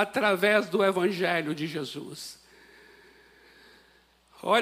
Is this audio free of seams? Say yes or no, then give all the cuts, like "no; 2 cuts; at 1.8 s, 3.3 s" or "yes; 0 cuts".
yes; 0 cuts